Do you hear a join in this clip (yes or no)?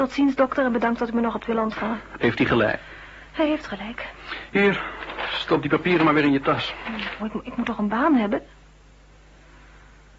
yes